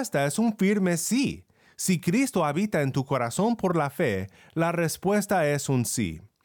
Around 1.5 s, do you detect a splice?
no; 0 cuts

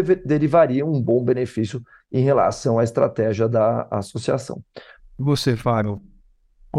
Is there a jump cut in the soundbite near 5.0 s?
yes; 1 cut; at 5.0 s

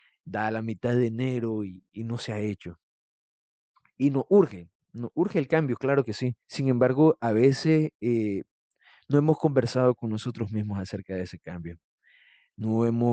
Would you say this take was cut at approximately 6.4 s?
yes; 1 cut; at 6.4 s

